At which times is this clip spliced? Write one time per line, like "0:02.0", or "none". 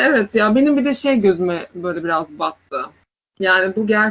none